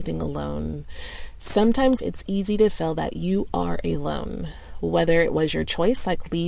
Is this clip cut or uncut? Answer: cut